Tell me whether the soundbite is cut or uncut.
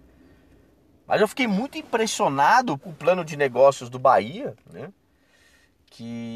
cut